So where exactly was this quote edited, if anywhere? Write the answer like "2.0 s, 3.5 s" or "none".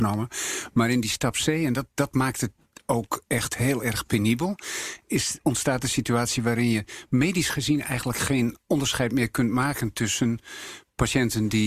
none